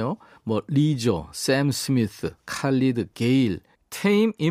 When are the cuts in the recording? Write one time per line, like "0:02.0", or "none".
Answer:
none